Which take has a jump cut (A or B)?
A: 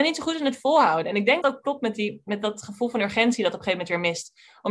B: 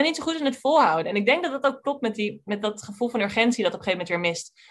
A